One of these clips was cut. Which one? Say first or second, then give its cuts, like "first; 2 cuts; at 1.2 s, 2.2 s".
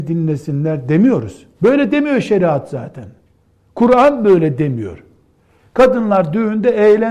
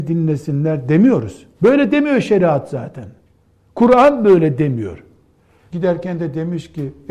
second; 1 cut; at 5.7 s